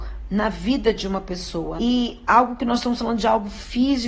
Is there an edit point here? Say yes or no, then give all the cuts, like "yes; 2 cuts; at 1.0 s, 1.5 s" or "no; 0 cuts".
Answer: yes; 1 cut; at 1.8 s